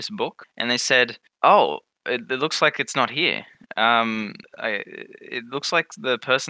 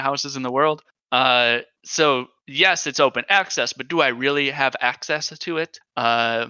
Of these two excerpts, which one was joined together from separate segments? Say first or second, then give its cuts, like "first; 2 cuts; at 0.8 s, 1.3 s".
second; 1 cut; at 1.0 s